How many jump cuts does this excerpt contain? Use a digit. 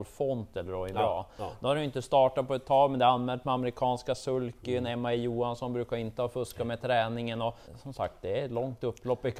1